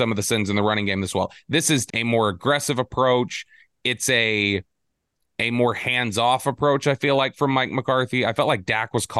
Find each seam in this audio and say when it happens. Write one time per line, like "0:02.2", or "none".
0:01.9